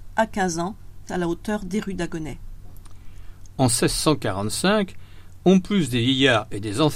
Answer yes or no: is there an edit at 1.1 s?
yes